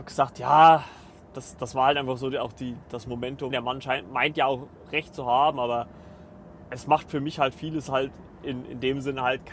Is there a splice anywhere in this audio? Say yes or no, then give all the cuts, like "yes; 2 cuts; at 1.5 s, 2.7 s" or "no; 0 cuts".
yes; 1 cut; at 3.5 s